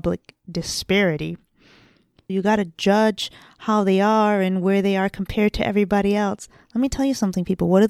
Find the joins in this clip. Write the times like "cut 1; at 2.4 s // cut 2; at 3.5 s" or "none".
cut 1; at 2.3 s